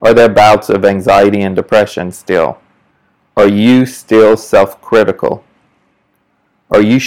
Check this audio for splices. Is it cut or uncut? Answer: uncut